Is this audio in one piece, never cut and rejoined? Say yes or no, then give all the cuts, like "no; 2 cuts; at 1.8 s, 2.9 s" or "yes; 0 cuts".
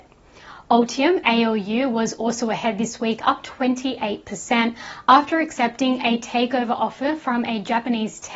yes; 0 cuts